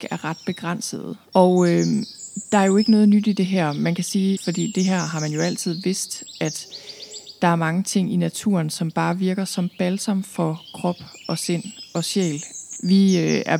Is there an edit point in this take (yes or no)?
yes